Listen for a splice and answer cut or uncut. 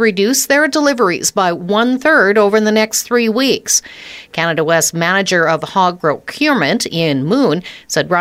uncut